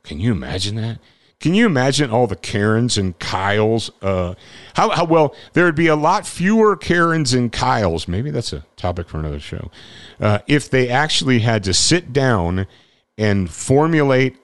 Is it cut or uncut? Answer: uncut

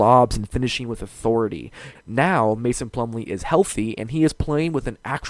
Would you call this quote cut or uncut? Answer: cut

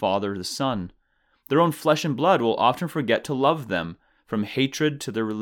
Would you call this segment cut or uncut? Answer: uncut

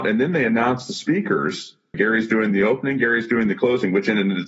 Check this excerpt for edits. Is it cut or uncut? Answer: cut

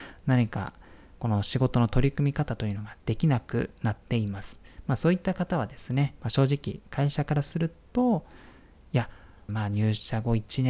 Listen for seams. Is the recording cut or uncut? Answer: cut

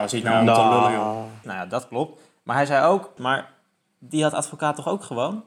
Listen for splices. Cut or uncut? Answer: cut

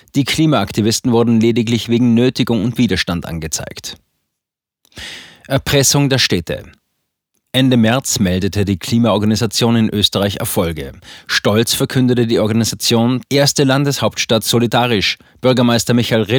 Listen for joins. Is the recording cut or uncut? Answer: cut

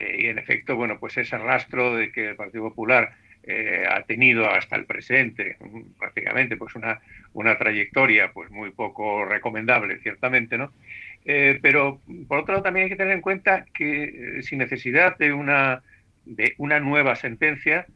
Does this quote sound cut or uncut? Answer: uncut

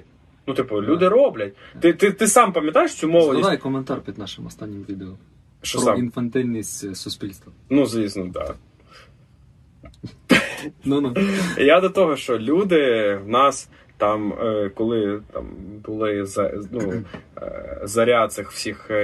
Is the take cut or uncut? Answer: uncut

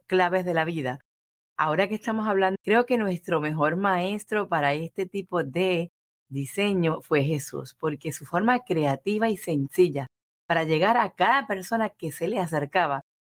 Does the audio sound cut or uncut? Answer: cut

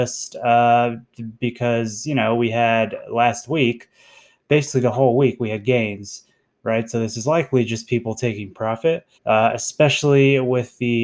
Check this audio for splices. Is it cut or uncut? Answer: cut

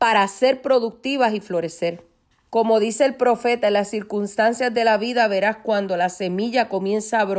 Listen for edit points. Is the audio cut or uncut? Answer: cut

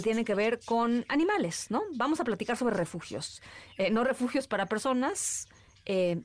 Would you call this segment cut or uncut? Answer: uncut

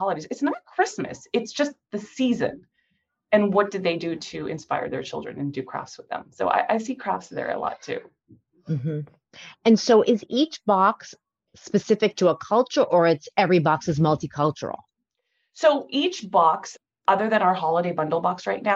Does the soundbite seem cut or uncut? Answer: uncut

